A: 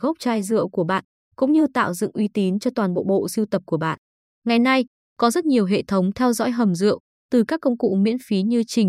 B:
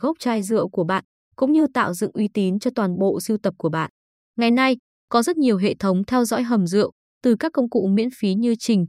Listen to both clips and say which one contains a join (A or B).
B